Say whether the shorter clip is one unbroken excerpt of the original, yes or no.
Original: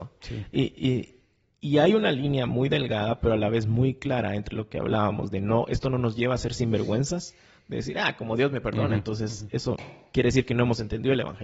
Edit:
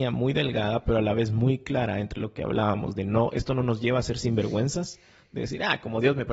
yes